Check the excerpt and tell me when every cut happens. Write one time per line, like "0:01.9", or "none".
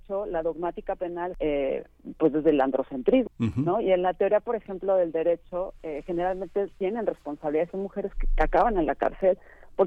0:01.3
0:03.3

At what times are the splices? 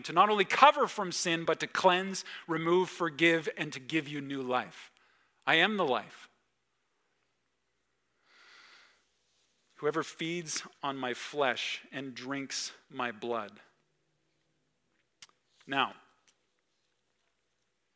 none

